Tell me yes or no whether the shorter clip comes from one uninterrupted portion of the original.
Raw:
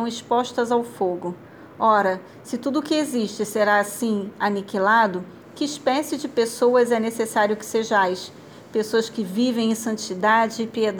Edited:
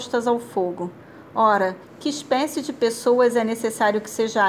no